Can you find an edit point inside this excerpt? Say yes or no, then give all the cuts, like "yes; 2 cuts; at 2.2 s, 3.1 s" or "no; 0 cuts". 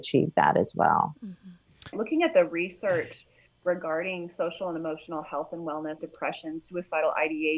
yes; 2 cuts; at 1.9 s, 6.0 s